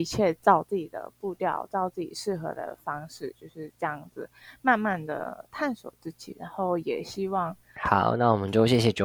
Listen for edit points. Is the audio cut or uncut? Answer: cut